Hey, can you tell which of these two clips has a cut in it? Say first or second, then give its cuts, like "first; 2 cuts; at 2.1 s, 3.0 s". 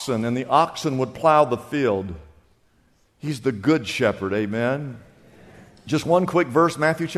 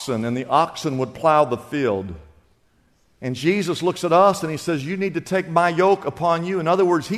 first; 1 cut; at 3.1 s